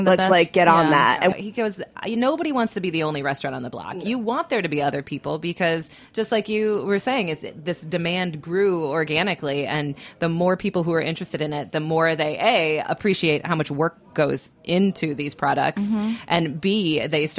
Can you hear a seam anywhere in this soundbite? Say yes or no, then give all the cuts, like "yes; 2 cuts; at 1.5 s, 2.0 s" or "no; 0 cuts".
yes; 1 cut; at 1.3 s